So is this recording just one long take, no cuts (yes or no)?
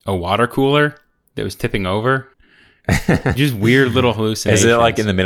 no